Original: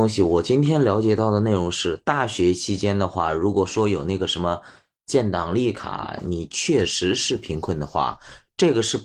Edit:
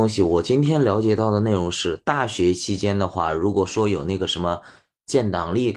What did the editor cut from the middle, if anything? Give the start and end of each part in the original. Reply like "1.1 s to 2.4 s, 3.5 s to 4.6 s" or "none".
none